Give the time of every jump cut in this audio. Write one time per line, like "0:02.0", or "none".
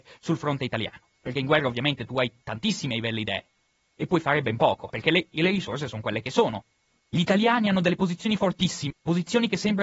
0:04.9
0:07.0
0:08.9